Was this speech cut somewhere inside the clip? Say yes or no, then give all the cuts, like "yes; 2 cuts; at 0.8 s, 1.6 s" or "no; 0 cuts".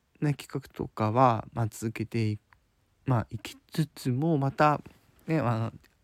no; 0 cuts